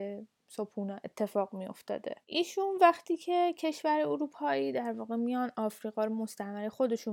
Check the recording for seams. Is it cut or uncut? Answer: cut